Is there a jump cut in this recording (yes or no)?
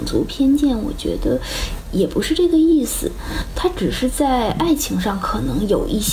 no